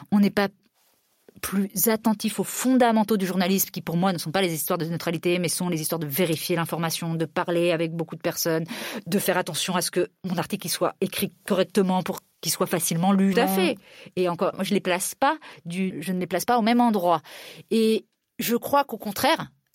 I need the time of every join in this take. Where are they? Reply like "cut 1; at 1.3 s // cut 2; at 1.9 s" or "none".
cut 1; at 13.3 s // cut 2; at 14.5 s // cut 3; at 15.9 s